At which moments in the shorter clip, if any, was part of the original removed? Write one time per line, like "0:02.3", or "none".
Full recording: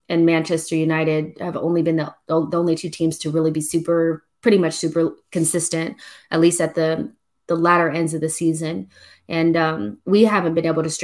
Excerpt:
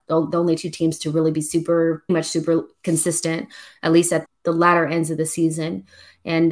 0:02.1
0:04.3